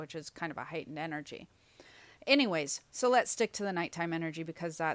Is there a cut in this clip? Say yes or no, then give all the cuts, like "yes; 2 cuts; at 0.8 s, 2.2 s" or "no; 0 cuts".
no; 0 cuts